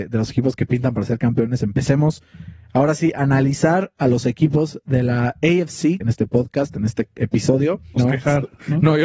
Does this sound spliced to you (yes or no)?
yes